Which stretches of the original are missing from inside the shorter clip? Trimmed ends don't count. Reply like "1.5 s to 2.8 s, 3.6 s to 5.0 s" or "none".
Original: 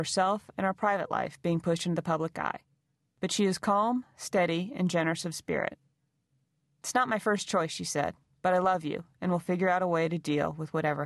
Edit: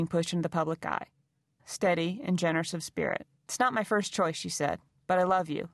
3.1 s to 4.1 s, 5.9 s to 6.7 s

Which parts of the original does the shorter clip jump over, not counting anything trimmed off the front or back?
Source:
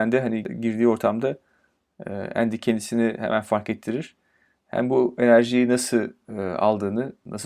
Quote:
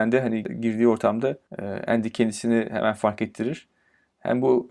1.5 s to 1.9 s

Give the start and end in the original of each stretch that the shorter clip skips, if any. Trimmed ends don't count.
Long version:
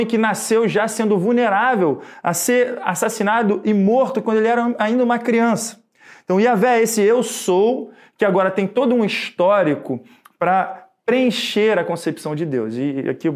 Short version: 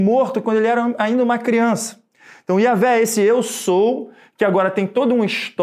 none

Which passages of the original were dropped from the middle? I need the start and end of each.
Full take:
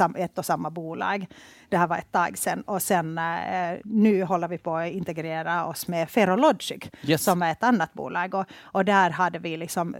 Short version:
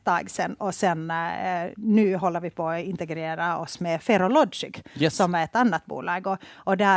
none

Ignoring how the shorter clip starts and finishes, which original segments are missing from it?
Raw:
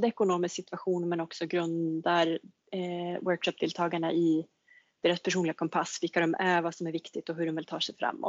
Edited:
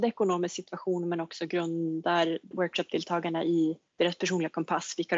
2.5 s to 3.2 s, 4.6 s to 4.9 s

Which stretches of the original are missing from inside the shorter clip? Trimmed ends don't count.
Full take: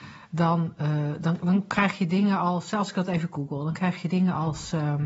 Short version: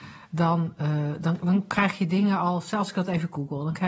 none

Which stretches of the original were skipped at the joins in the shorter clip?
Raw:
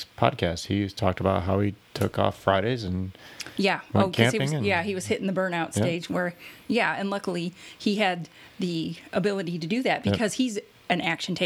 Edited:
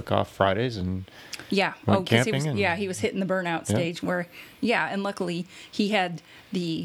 none

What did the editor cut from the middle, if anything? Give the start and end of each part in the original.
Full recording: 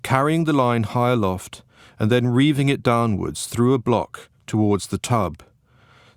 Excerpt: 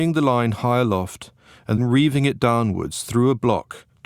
2.1 s to 2.2 s

